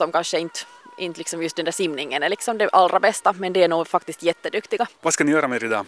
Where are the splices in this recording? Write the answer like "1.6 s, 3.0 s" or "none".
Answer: 5.0 s